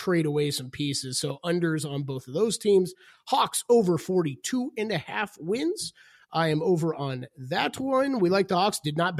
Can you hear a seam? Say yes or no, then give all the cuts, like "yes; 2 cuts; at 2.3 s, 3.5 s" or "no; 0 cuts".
no; 0 cuts